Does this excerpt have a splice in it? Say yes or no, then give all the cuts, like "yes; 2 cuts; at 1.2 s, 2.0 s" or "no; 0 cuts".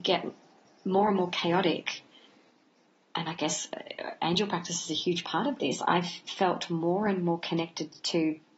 no; 0 cuts